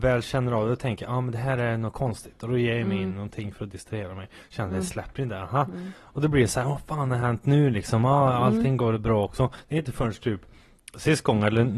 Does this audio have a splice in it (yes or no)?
no